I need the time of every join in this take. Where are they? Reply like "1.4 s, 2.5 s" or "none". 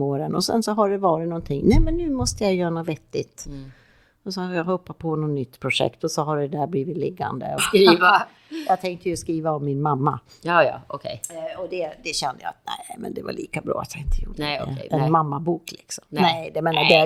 7.6 s